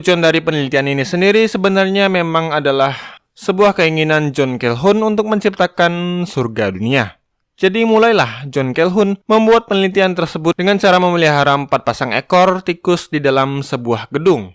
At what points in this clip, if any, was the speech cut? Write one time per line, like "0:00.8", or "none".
0:07.4
0:09.2